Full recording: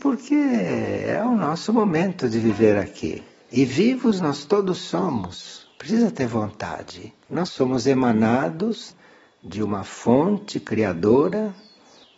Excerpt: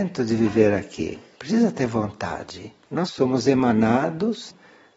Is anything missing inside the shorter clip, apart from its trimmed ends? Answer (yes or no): yes